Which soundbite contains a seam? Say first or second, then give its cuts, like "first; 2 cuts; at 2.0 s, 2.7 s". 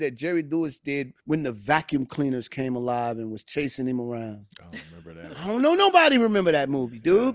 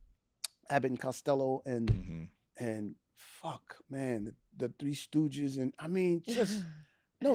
first; 1 cut; at 1.2 s